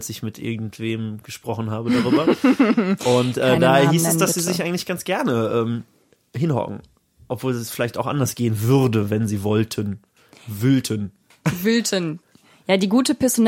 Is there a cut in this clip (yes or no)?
no